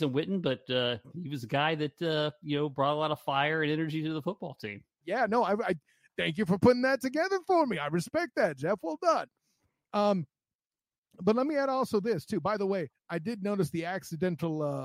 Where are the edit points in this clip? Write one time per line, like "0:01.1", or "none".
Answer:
0:05.0